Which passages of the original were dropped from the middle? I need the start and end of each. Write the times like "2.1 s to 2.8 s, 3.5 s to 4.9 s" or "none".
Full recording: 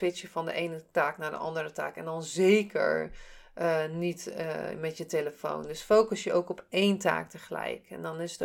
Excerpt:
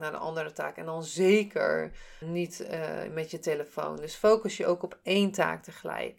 3.4 s to 3.9 s